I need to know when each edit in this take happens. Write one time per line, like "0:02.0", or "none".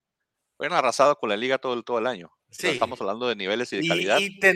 0:02.4